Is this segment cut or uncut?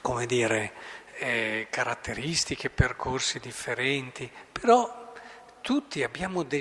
uncut